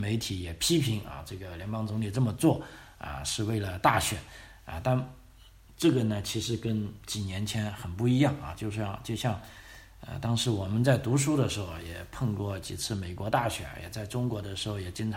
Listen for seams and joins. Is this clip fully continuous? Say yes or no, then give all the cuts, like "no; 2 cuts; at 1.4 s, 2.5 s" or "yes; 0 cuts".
yes; 0 cuts